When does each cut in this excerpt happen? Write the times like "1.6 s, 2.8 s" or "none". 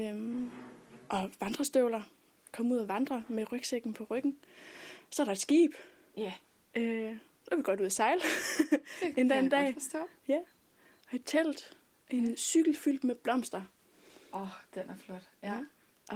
none